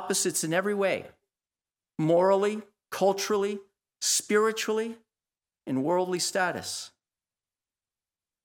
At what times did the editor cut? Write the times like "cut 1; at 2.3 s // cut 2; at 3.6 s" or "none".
none